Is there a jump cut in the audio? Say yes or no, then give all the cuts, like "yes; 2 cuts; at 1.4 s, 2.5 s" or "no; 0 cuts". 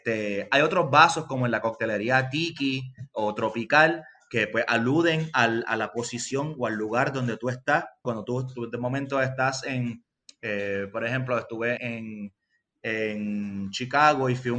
yes; 2 cuts; at 8.0 s, 11.8 s